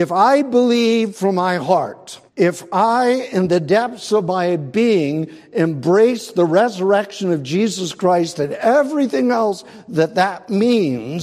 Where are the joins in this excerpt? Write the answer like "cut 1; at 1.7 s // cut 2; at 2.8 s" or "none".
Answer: cut 1; at 2.3 s